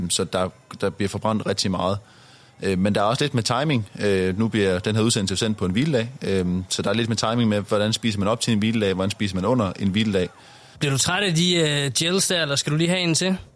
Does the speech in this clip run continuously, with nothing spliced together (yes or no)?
no